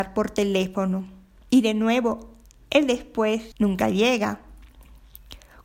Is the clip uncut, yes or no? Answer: no